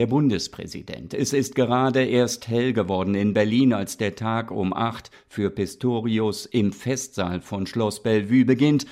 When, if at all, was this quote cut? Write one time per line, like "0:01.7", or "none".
none